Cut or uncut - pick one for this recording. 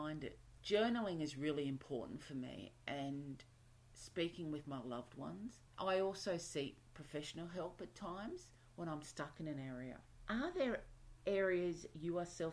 uncut